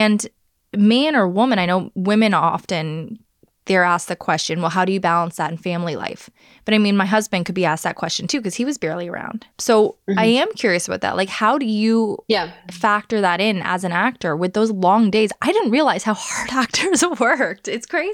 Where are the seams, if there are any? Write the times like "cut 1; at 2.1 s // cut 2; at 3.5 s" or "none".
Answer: cut 1; at 9.5 s